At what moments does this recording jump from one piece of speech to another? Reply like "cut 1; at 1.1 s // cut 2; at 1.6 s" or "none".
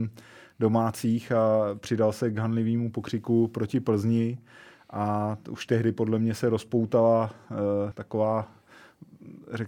cut 1; at 7.9 s